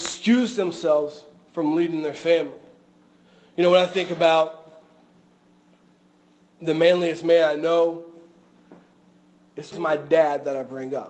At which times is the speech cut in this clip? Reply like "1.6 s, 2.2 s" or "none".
9.7 s